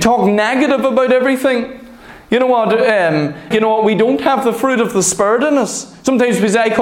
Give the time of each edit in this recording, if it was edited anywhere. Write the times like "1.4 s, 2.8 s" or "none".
3.5 s